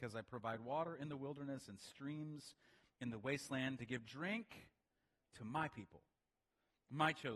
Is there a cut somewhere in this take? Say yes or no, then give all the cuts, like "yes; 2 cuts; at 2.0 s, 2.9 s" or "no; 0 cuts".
no; 0 cuts